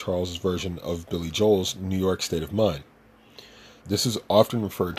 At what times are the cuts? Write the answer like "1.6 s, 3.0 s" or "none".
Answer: 3.8 s